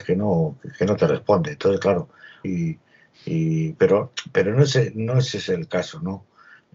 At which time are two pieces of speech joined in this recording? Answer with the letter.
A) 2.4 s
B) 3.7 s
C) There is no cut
A